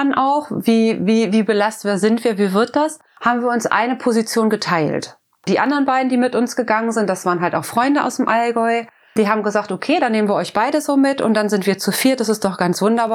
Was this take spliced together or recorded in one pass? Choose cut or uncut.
uncut